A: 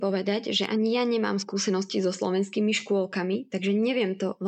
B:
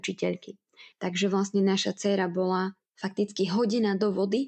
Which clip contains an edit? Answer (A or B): B